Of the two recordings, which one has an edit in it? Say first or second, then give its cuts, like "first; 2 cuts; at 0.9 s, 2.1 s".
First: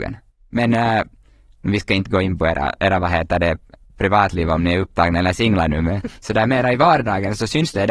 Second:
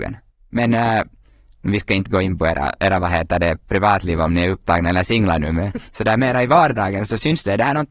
second; 1 cut; at 3.6 s